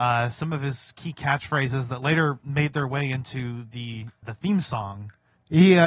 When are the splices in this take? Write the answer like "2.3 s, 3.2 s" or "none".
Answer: 4.2 s